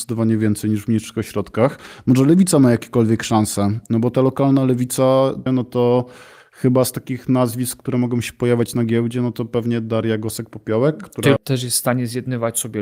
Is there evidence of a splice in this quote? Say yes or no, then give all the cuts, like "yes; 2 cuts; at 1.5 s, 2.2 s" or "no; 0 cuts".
yes; 2 cuts; at 5.5 s, 11.4 s